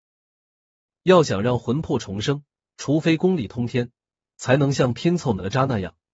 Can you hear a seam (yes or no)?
no